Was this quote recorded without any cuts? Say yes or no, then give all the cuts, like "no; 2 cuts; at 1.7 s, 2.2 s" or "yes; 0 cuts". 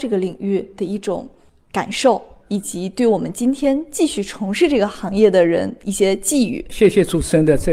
yes; 0 cuts